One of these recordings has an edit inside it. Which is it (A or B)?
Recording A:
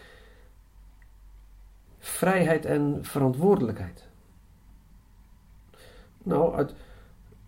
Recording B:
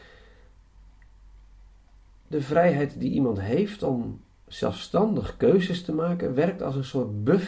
A